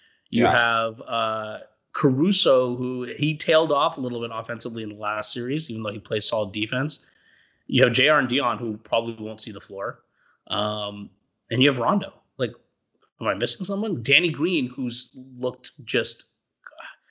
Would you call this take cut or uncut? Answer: uncut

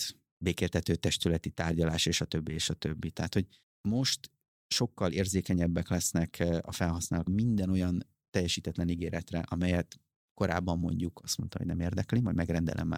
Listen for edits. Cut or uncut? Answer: cut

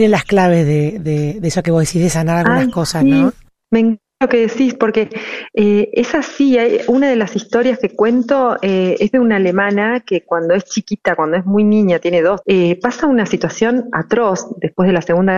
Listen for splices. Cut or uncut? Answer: cut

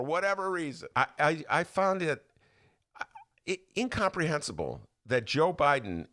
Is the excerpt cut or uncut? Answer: cut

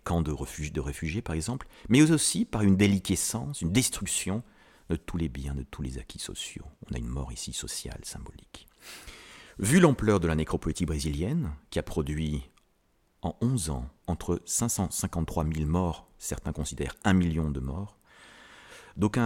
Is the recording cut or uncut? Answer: cut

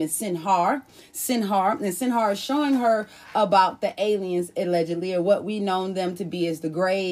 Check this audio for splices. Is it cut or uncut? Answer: uncut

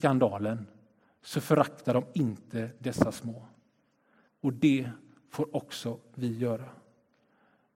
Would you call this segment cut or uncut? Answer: cut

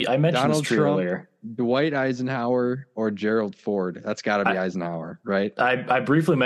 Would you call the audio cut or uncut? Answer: uncut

